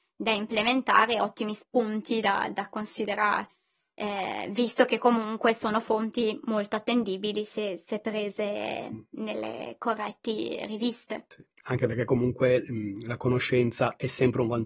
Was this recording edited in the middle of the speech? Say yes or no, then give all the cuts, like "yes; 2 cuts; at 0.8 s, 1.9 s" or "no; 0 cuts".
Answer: no; 0 cuts